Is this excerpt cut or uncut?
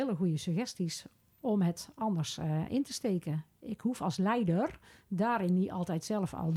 uncut